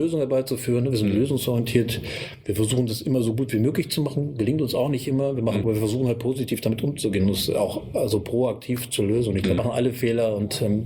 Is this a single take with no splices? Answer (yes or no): no